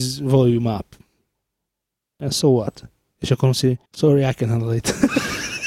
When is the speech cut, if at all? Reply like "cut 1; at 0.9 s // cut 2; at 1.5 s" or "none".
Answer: cut 1; at 3.9 s